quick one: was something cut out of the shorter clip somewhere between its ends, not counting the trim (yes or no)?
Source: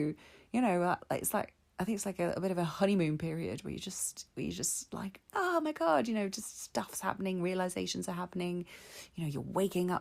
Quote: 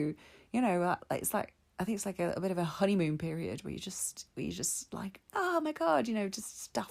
no